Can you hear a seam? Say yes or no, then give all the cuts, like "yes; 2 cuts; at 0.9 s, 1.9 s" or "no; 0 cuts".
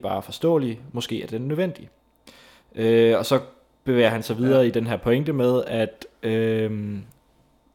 no; 0 cuts